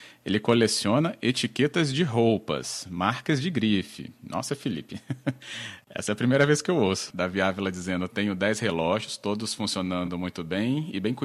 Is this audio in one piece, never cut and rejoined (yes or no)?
no